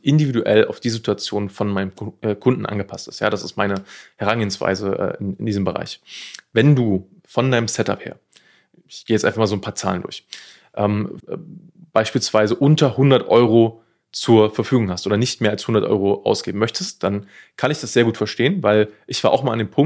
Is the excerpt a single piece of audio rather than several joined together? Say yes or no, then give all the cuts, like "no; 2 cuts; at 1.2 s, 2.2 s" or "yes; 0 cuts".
no; 1 cut; at 11.2 s